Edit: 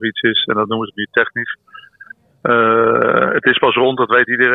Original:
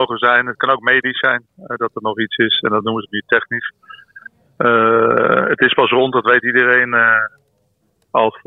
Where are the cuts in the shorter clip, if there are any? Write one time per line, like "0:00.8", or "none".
none